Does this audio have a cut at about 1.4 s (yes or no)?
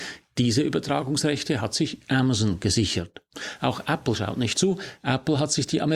no